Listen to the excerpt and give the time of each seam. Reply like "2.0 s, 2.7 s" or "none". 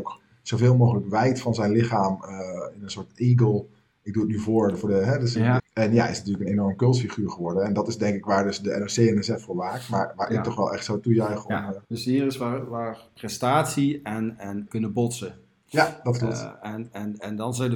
5.6 s, 11.8 s, 14.7 s